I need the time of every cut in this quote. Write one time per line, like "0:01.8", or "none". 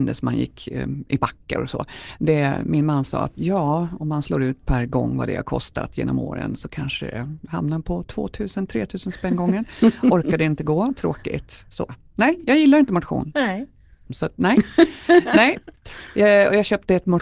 0:14.1